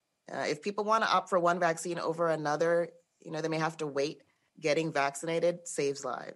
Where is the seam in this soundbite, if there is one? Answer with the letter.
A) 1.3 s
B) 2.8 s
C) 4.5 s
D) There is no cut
C